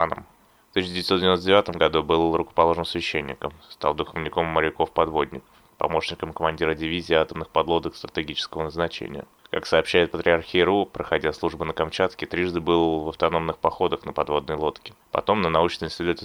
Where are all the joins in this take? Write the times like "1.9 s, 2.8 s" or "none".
15.0 s